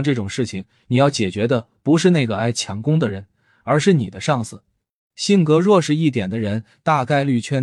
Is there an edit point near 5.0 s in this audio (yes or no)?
yes